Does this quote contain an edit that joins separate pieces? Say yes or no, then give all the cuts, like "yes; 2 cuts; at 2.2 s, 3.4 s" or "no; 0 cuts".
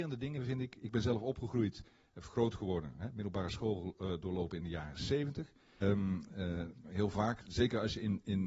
yes; 1 cut; at 5.8 s